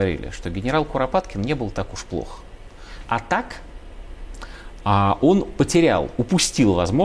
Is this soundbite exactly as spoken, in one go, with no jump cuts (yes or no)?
no